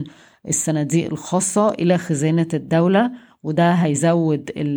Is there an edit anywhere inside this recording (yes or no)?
no